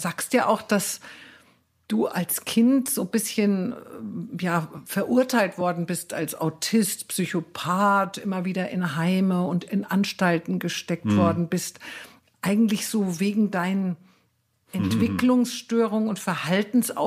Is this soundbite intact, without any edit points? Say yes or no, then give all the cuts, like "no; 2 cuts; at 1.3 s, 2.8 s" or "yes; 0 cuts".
yes; 0 cuts